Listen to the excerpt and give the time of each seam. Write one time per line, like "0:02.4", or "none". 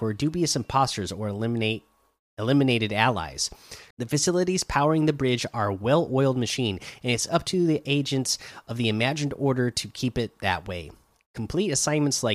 0:03.9